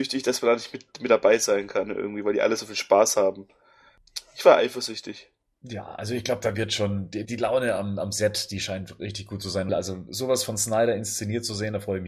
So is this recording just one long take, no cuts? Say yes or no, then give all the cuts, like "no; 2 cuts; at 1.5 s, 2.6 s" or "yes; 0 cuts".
no; 2 cuts; at 7.2 s, 9.7 s